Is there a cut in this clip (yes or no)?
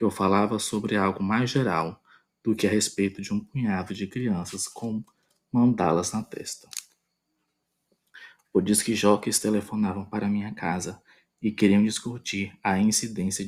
no